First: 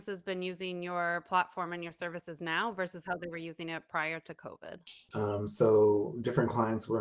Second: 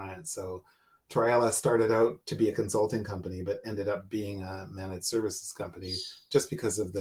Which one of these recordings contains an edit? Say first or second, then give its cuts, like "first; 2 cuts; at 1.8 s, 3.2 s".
first; 1 cut; at 5.1 s